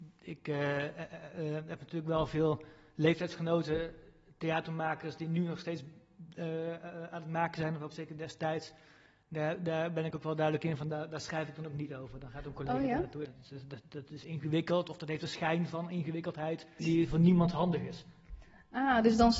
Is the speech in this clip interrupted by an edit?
yes; 2 cuts; at 13.2 s, 16.8 s

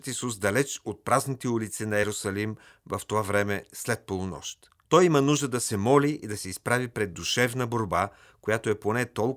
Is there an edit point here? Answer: yes; 1 cut; at 4.8 s

